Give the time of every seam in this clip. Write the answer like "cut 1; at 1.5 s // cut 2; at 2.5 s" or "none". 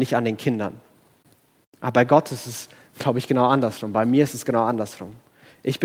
none